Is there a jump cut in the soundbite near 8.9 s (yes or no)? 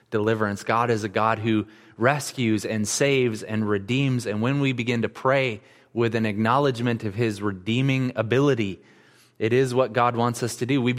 no